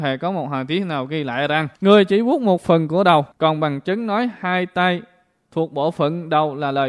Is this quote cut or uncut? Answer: cut